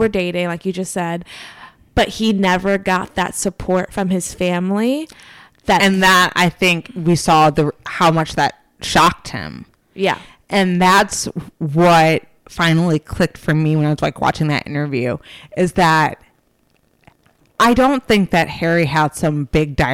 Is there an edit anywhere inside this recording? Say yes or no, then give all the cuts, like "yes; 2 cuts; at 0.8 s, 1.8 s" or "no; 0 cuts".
no; 0 cuts